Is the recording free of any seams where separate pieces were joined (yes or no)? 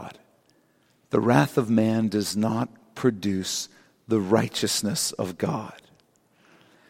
yes